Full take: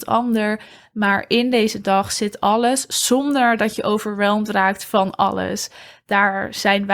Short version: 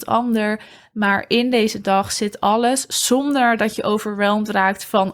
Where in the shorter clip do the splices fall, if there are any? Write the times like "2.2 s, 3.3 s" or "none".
none